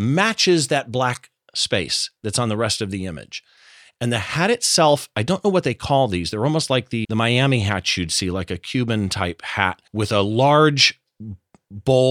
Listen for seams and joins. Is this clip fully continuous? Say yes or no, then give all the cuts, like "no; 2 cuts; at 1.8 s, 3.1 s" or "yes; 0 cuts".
no; 2 cuts; at 7.0 s, 9.9 s